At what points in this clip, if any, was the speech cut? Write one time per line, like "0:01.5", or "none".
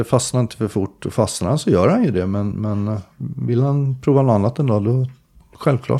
none

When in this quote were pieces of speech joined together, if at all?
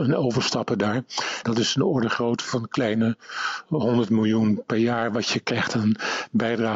0:01.4

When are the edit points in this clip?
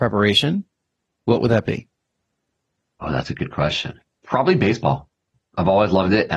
none

